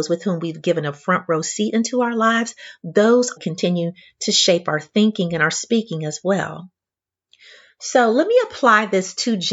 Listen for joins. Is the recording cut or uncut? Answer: cut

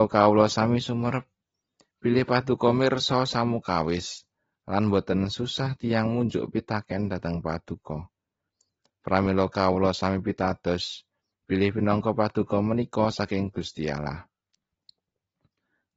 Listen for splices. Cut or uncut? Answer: uncut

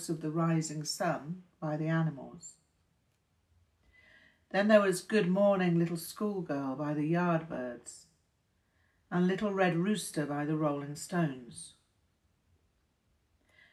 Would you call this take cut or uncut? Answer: uncut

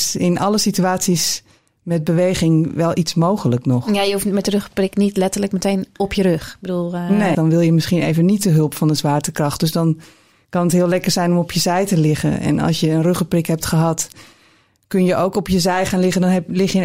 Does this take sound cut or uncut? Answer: cut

